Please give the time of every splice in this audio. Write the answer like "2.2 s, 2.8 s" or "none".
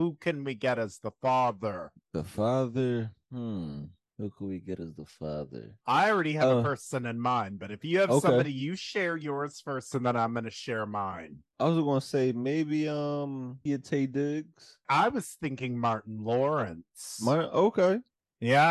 13.7 s, 14.8 s

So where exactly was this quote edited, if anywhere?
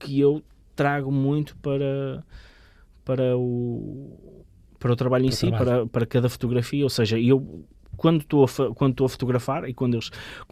none

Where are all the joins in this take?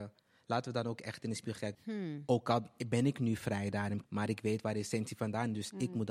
1.7 s, 4.0 s

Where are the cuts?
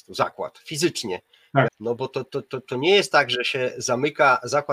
1.7 s

